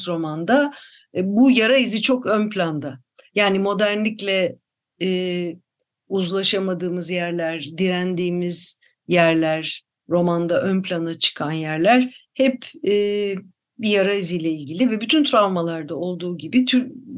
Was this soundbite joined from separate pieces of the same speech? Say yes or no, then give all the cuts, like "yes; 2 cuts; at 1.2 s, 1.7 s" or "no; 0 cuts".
no; 0 cuts